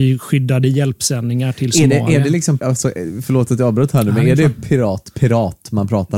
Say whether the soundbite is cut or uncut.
cut